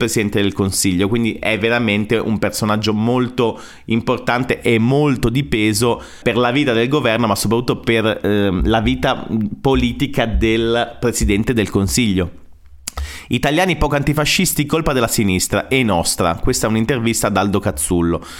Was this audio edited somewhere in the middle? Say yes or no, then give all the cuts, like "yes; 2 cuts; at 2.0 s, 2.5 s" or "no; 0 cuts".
yes; 1 cut; at 6.2 s